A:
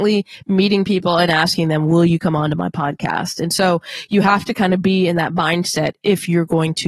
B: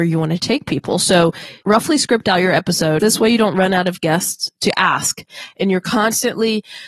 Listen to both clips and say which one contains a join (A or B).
B